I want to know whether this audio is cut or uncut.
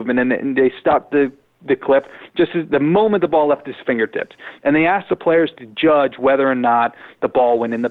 uncut